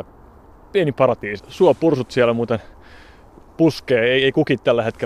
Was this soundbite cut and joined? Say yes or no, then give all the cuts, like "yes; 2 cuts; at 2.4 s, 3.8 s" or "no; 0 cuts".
yes; 1 cut; at 1.4 s